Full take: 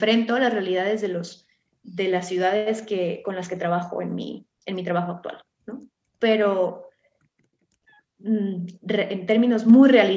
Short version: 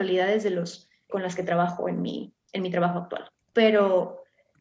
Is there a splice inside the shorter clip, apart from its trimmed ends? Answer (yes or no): yes